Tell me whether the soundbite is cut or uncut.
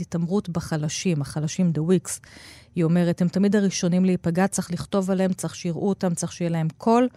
uncut